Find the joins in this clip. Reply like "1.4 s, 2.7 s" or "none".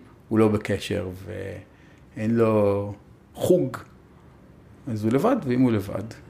none